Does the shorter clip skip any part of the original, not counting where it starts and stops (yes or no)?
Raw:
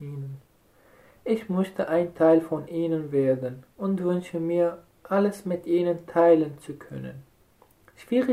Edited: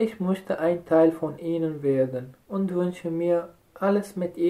no